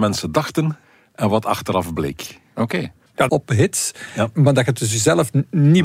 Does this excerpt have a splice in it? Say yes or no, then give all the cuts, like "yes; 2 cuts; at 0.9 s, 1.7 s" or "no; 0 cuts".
yes; 1 cut; at 3.3 s